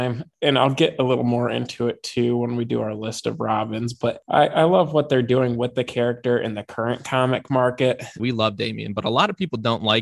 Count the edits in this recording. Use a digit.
1